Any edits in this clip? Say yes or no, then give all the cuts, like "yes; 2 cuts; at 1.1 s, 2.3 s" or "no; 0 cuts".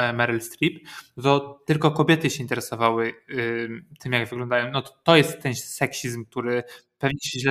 no; 0 cuts